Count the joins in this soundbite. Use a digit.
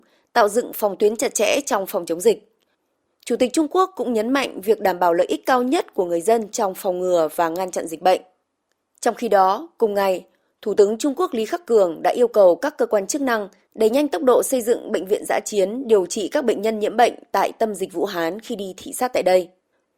0